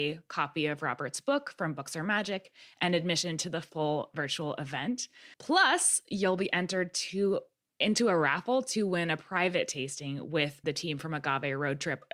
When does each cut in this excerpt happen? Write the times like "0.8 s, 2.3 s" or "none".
5.3 s, 10.6 s